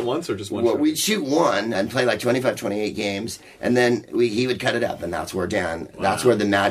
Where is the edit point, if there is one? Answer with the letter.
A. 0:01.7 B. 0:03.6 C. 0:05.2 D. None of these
A